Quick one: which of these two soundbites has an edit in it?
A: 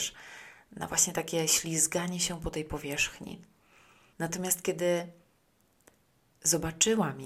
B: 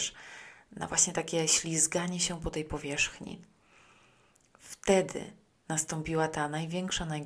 A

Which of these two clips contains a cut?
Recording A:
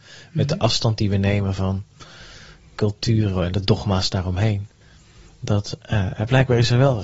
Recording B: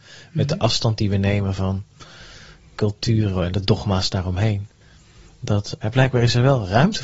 B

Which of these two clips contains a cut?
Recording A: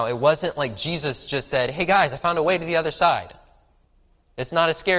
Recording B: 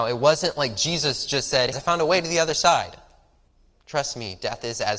B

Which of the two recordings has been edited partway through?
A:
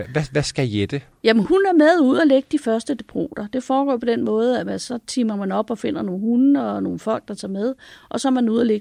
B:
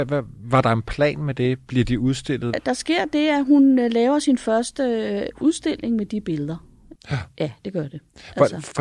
B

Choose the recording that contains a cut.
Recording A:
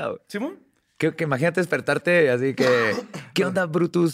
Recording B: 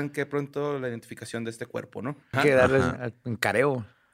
B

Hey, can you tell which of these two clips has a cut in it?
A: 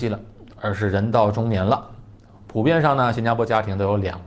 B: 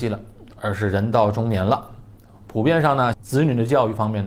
B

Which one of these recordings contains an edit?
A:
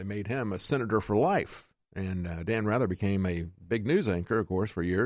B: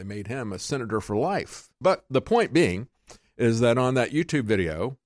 B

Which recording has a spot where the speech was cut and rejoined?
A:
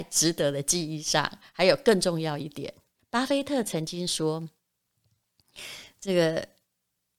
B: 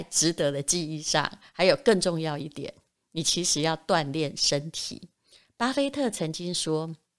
A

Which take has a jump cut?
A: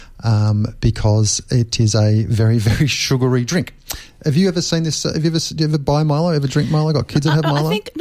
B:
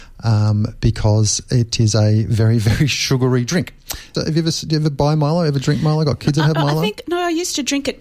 B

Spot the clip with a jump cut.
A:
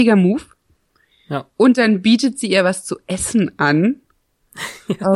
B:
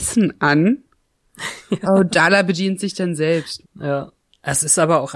B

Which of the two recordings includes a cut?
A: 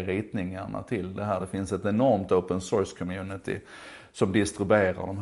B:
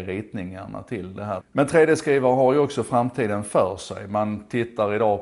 B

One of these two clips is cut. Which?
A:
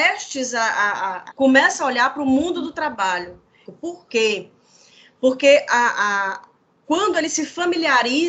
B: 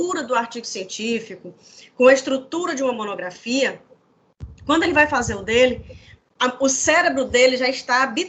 A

